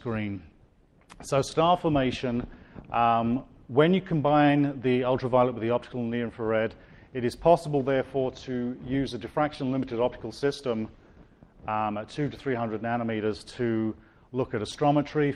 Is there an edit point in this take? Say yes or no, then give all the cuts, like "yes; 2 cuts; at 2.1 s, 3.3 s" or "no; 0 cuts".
no; 0 cuts